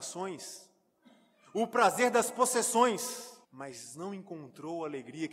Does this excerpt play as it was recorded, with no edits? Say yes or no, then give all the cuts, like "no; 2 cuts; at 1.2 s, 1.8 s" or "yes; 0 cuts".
no; 1 cut; at 3.4 s